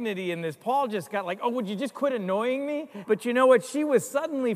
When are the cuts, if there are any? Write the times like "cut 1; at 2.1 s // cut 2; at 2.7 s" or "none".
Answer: cut 1; at 3.0 s